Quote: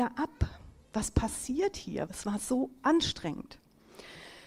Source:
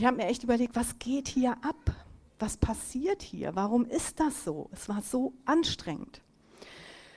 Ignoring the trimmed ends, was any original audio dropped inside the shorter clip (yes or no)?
yes